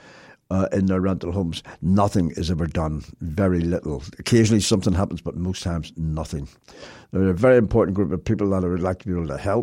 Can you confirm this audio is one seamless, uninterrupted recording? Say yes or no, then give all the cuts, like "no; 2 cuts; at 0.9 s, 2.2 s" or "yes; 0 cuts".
yes; 0 cuts